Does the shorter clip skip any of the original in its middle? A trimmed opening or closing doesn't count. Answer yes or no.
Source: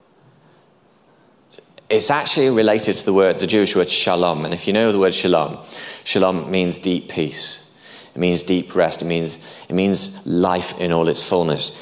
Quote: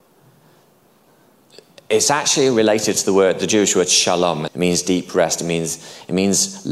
yes